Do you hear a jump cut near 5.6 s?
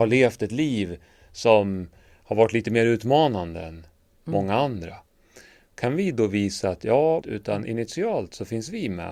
no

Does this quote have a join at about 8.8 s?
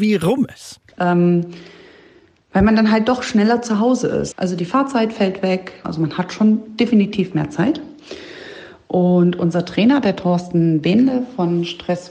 no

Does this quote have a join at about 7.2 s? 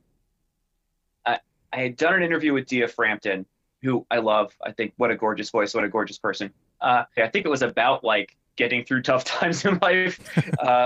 yes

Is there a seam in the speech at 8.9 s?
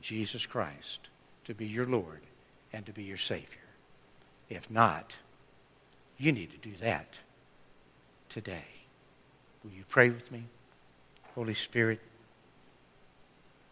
no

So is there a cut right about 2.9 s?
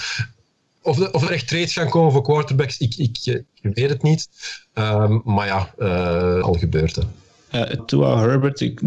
no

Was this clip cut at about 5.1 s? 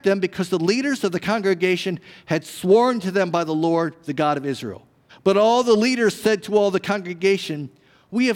yes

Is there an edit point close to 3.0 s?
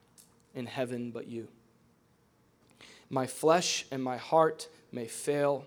yes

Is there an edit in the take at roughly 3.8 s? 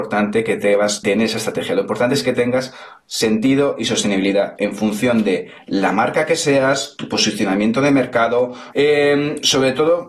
no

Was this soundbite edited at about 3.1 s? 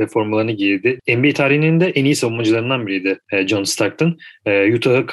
no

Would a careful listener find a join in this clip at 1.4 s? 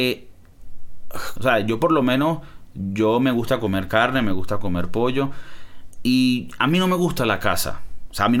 yes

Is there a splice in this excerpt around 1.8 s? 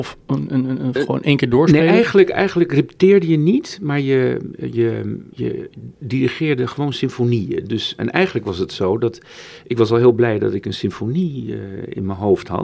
no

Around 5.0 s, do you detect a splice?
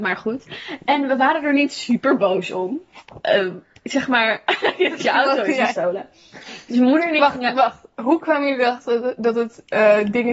yes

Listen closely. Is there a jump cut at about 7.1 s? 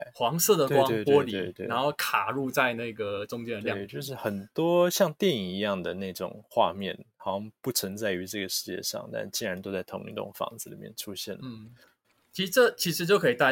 no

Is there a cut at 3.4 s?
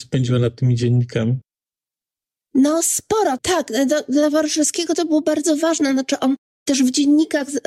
yes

